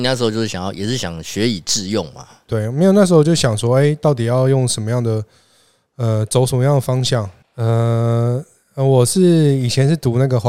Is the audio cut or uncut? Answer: cut